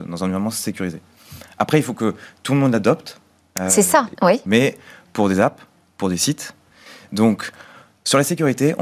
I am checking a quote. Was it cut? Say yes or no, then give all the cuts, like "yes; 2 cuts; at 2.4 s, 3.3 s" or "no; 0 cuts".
yes; 1 cut; at 4.2 s